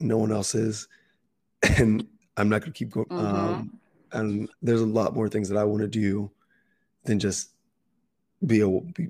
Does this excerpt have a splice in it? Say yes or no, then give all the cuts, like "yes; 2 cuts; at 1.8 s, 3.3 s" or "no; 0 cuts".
yes; 2 cuts; at 3.0 s, 4.6 s